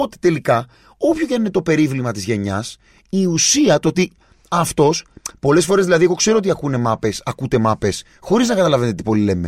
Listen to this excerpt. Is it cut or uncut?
uncut